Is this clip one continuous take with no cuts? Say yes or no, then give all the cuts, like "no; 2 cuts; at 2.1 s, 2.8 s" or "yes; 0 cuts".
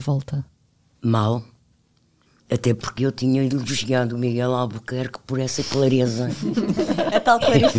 yes; 0 cuts